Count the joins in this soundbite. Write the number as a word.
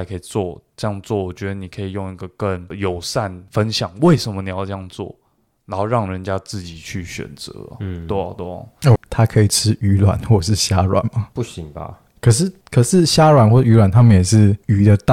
two